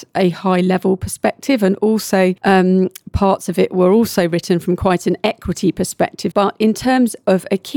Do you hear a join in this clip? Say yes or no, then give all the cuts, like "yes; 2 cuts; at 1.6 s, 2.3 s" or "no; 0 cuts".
yes; 1 cut; at 6.3 s